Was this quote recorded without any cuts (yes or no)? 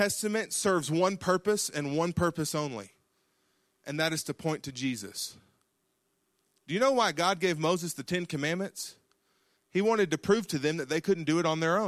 yes